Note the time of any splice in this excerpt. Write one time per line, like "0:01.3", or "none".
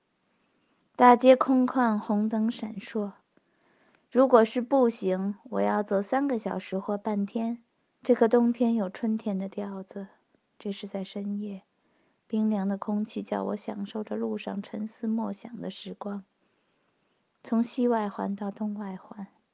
0:07.9